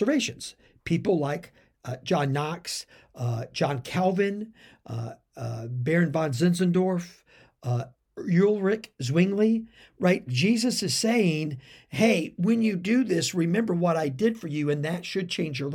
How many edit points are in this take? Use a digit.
1